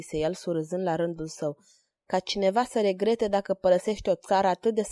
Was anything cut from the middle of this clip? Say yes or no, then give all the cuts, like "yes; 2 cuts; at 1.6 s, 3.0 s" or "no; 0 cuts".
no; 0 cuts